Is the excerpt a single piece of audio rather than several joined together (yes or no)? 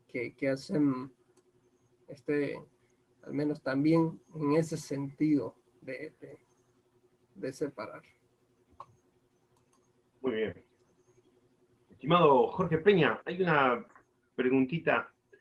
yes